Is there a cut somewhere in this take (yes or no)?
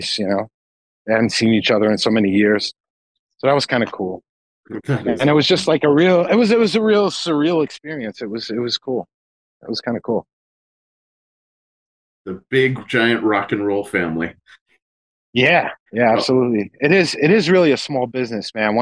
yes